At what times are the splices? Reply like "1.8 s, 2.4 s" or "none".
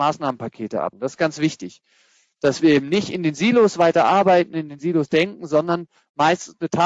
0.9 s